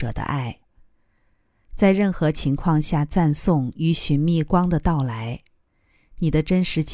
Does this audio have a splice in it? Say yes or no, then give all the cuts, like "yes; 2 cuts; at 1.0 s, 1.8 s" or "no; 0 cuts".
no; 0 cuts